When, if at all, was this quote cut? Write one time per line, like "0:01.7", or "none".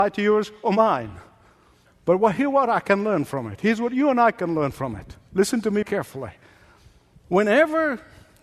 0:05.8